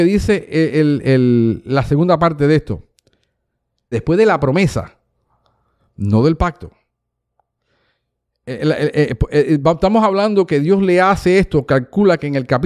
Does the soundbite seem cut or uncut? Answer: cut